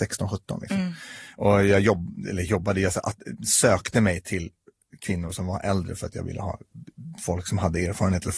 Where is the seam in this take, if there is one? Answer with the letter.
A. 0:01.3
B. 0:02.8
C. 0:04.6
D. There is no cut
D